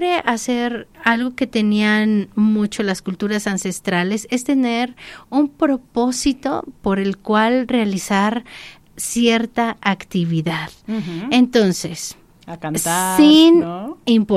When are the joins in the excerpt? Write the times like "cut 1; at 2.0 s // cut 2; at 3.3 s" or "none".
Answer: cut 1; at 0.9 s